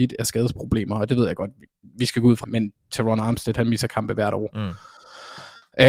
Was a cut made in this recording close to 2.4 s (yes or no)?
yes